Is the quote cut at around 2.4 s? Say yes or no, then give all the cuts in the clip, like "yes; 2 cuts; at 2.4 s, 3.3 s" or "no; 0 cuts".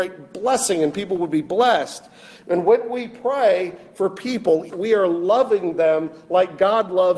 no; 1 cut; at 4.7 s